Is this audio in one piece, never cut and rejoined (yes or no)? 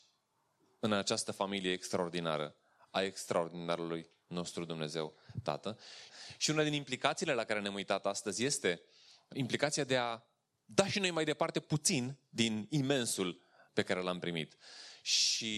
no